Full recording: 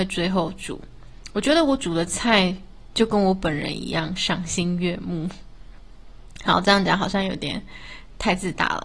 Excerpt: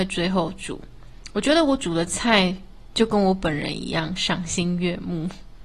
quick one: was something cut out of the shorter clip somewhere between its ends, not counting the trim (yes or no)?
no